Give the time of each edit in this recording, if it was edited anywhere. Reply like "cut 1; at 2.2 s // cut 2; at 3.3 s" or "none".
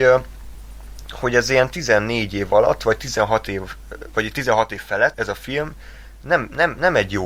cut 1; at 5.1 s